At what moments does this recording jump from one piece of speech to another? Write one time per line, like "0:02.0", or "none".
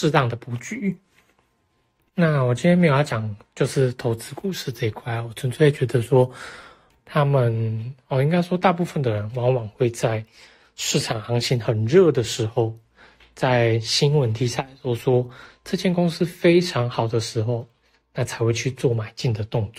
0:06.9

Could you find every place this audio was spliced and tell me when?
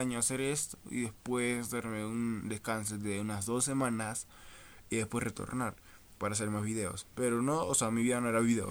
none

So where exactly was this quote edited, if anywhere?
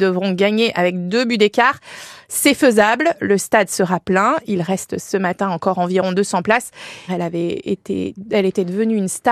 0:07.1

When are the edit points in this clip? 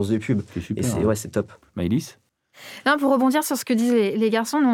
none

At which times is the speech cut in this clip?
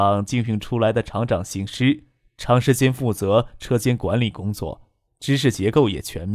0:05.1

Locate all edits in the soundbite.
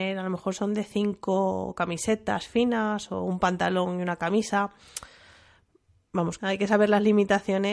0:06.4

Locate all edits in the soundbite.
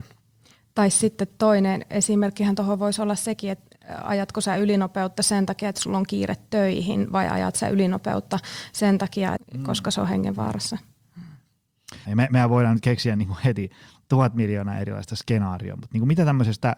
0:09.4
0:12.1

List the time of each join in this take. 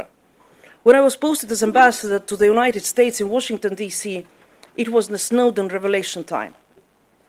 none

